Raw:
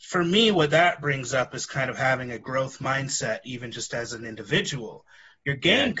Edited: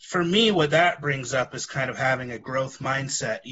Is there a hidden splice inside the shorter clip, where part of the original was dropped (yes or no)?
no